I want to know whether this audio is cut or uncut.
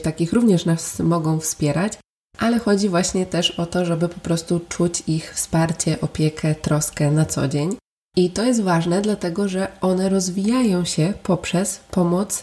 uncut